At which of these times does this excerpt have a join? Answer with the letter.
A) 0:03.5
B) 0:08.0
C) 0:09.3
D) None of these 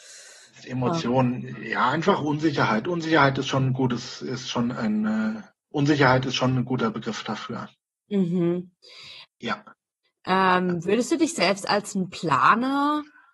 C